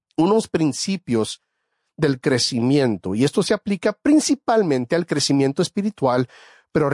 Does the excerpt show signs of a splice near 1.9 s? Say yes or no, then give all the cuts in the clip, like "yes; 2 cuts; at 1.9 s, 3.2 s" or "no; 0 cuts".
no; 0 cuts